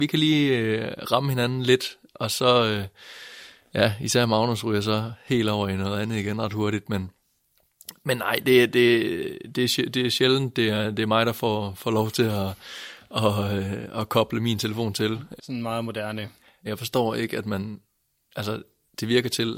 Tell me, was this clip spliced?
yes; 2 cuts; at 15.4 s, 16.7 s

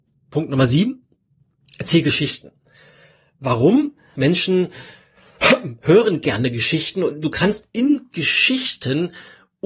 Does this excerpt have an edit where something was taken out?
yes; 1 cut; at 4.2 s

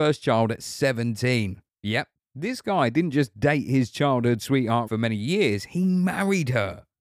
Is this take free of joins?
no; 2 cuts; at 1.7 s, 4.9 s

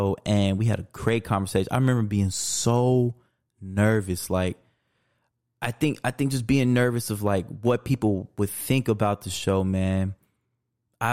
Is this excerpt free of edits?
yes; 0 cuts

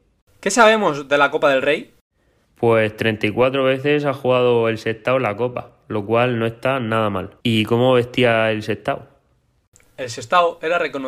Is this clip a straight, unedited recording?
no; 1 cut; at 7.4 s

